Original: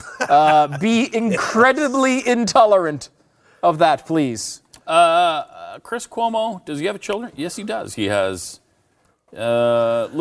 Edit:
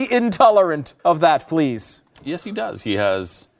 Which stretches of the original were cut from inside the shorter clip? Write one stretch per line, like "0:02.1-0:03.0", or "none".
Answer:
0:03.1-0:03.6
0:04.8-0:07.3